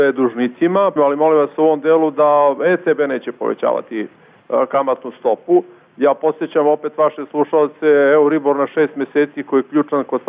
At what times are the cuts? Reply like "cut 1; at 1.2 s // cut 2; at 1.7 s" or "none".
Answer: cut 1; at 1.0 s